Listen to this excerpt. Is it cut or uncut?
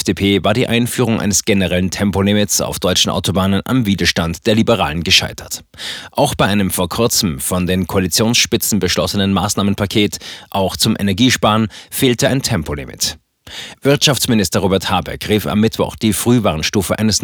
uncut